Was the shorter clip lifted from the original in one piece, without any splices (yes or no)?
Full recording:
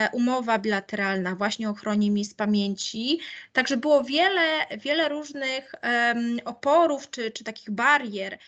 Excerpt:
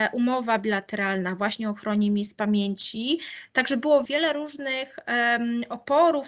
no